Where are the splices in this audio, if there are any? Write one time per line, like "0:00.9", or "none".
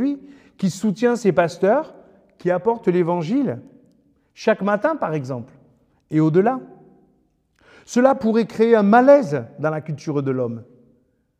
none